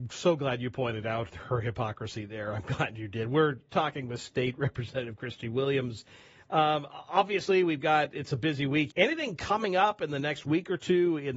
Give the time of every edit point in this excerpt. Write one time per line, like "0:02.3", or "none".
0:08.9